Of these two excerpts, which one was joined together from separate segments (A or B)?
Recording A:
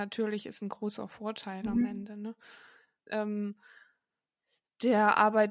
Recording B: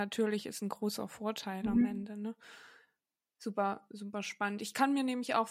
A